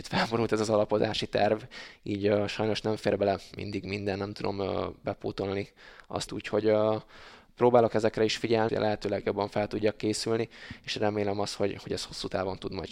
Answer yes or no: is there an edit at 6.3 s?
yes